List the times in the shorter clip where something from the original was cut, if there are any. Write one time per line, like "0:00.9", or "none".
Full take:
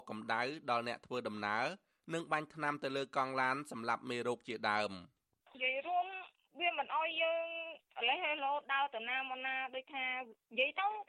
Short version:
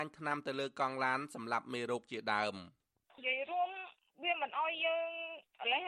none